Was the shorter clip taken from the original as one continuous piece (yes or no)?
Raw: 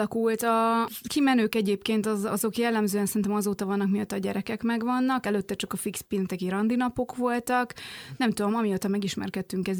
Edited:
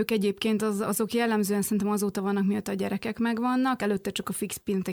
yes